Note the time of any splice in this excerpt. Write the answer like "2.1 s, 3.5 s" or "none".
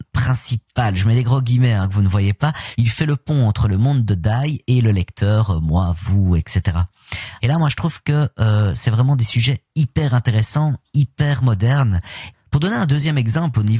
2.7 s, 7.4 s, 12.3 s